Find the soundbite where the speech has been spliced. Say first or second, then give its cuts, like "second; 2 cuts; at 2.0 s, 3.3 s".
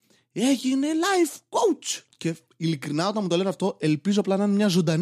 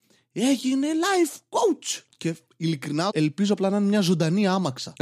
second; 1 cut; at 3.1 s